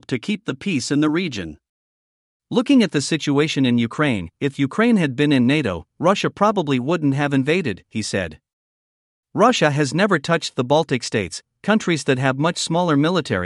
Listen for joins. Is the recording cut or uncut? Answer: uncut